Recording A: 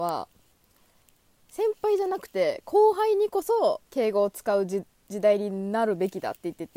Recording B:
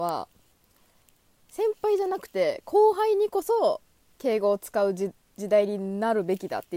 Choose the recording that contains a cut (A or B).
A